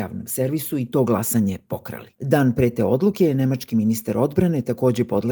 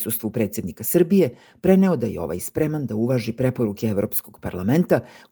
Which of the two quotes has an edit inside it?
first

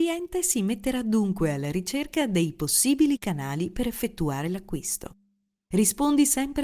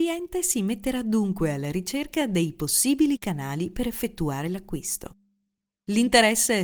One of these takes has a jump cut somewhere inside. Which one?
first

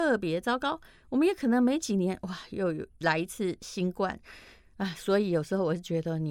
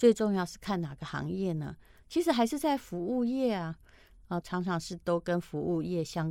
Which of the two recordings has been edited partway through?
second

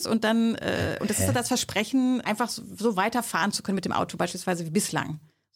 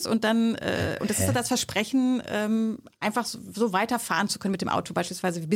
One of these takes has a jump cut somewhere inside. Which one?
first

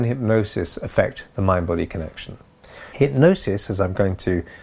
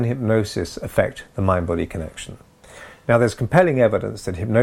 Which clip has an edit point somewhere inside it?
first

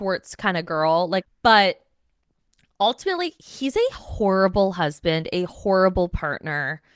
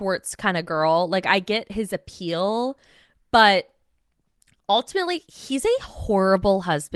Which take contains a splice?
first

